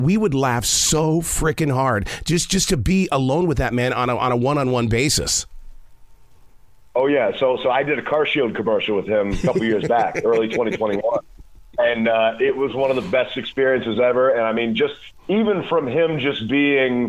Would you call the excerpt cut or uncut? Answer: uncut